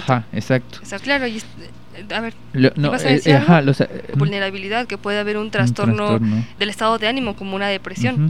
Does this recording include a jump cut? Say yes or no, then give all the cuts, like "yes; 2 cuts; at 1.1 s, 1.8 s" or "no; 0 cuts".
yes; 3 cuts; at 1.0 s, 4.1 s, 6.6 s